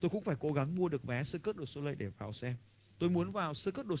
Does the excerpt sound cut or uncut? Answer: cut